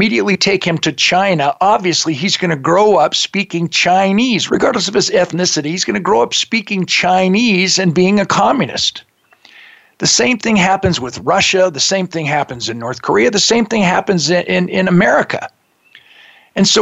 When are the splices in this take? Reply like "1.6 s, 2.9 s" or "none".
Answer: 4.5 s